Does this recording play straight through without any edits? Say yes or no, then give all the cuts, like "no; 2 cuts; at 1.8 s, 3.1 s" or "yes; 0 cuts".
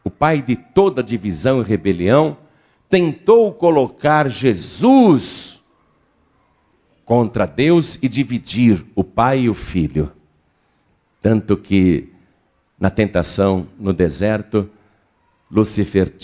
yes; 0 cuts